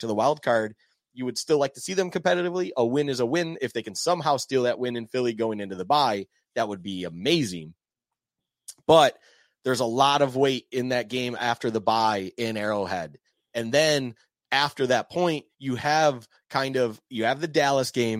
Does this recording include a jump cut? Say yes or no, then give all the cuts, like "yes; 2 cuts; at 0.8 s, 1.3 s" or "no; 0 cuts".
no; 0 cuts